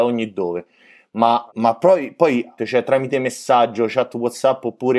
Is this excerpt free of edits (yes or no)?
no